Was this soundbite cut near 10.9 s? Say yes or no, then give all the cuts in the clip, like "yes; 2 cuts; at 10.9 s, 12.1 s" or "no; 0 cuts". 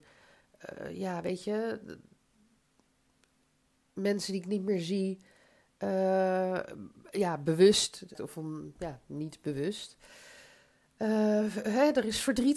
no; 1 cut; at 8.1 s